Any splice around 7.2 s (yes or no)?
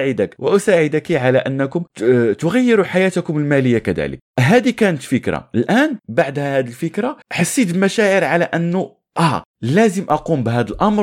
yes